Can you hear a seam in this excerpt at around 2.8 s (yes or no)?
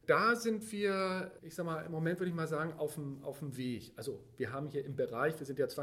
no